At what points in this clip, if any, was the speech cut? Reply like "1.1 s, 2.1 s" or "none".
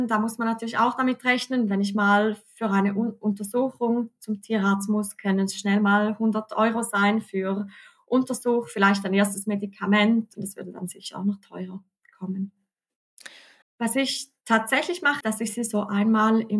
10.3 s, 13.6 s, 15.2 s